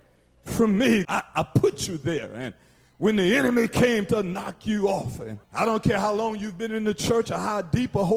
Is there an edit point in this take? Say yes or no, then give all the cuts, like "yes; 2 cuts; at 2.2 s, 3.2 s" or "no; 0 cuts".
yes; 2 cuts; at 1.0 s, 5.4 s